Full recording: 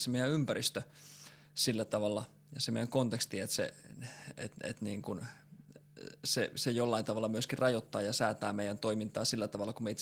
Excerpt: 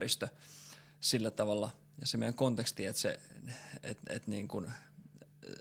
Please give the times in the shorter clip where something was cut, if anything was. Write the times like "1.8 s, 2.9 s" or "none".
none